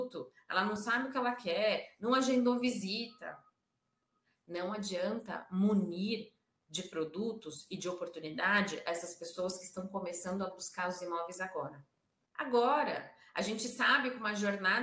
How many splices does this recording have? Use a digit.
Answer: 1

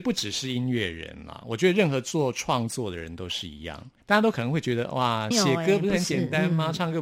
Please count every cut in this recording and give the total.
2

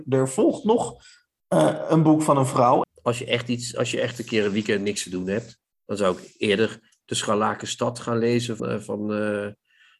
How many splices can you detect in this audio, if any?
2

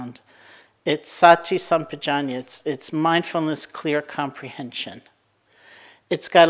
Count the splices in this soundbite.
0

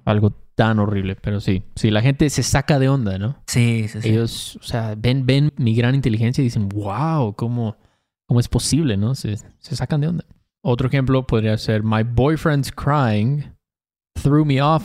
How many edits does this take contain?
1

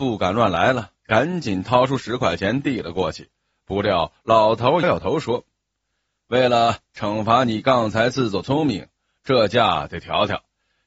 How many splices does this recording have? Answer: 1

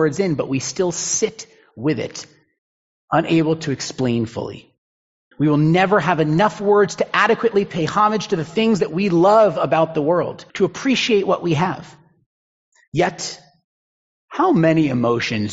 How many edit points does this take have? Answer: 2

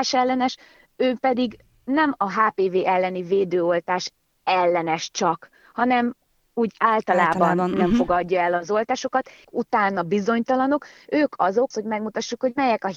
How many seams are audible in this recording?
2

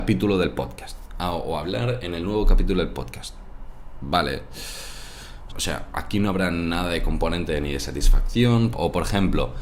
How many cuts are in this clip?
2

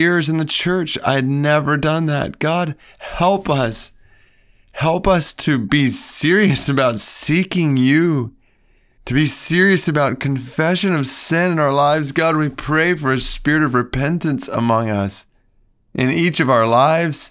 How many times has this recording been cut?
1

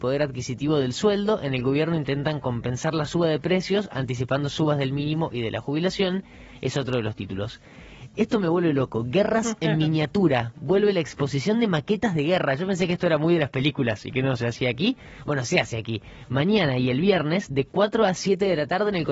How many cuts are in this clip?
0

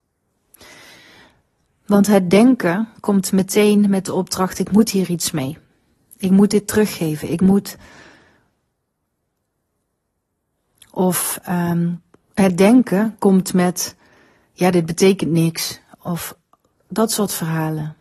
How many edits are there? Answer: 0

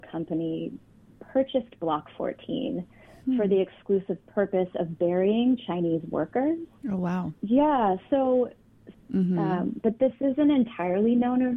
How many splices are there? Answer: 2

